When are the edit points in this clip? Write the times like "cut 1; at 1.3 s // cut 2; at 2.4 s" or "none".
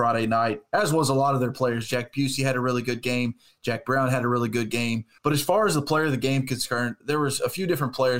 cut 1; at 5.2 s // cut 2; at 7.0 s